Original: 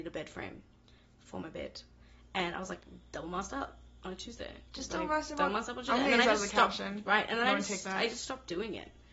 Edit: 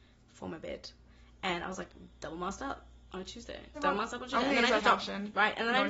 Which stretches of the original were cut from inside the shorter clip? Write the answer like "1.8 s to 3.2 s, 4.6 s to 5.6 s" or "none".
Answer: 4.7 s to 5.3 s, 6.3 s to 6.5 s